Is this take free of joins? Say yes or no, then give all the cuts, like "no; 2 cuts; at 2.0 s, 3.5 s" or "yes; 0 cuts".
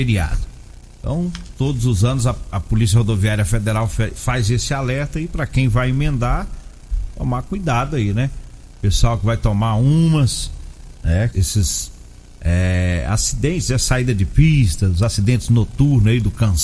no; 1 cut; at 11.3 s